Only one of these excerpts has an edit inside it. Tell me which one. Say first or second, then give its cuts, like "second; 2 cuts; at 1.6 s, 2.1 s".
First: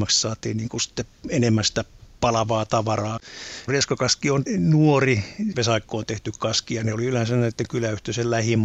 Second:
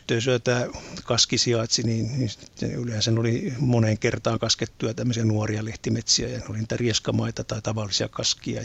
first; 1 cut; at 5.5 s